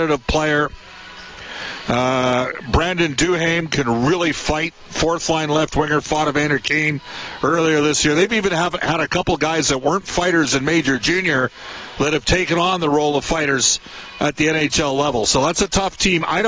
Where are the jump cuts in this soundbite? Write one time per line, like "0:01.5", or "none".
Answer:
none